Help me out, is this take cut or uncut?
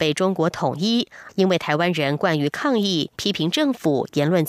cut